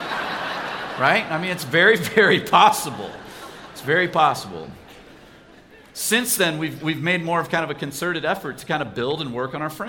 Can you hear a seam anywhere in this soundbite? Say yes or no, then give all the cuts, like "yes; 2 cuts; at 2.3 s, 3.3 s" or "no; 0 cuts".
no; 0 cuts